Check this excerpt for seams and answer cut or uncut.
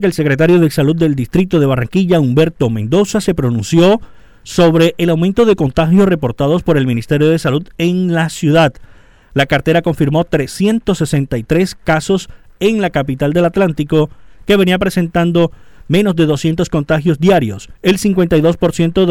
cut